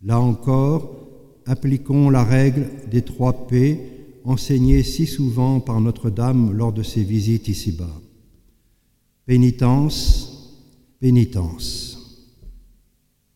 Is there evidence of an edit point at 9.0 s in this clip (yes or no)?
no